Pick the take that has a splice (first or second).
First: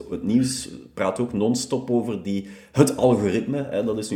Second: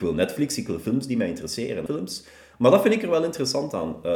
second